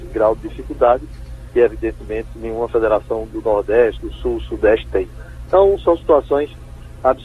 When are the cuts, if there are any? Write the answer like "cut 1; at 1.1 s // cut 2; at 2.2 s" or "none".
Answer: cut 1; at 4.0 s